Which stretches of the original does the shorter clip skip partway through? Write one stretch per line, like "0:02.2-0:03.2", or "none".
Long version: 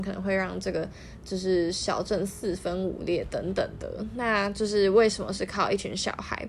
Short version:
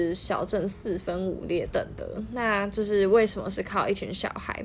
0:03.3-0:03.5